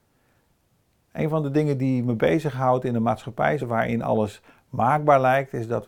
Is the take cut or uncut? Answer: cut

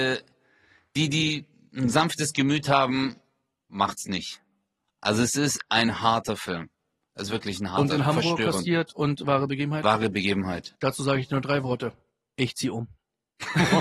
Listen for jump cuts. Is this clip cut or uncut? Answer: uncut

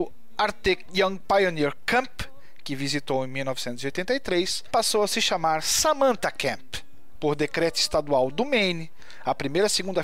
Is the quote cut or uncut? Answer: cut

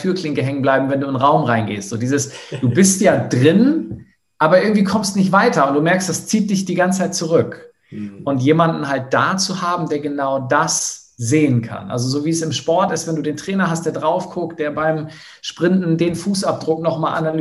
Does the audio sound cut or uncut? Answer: uncut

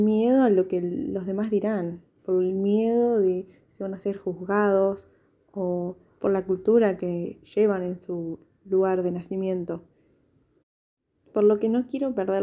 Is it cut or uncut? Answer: uncut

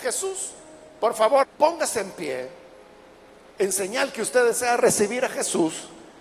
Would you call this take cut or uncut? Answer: cut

